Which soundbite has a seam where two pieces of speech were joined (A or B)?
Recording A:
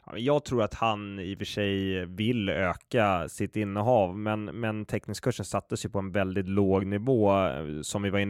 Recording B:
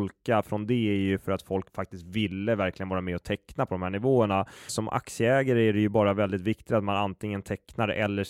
B